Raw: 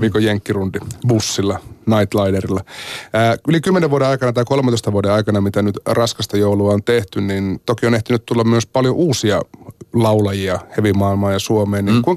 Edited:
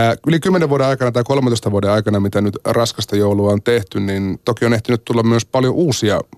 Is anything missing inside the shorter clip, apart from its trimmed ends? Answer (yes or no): no